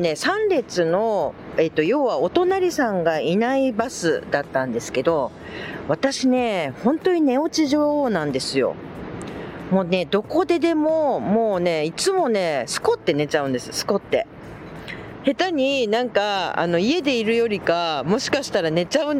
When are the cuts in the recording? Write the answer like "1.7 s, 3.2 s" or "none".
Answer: 15.2 s